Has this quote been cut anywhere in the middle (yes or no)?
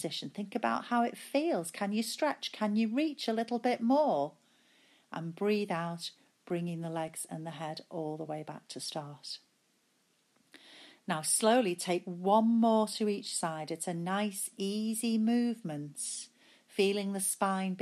no